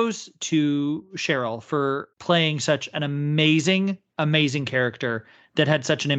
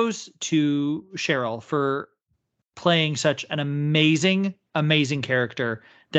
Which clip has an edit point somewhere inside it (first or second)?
first